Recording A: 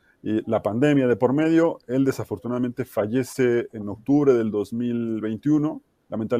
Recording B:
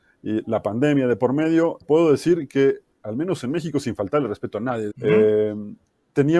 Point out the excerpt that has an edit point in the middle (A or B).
B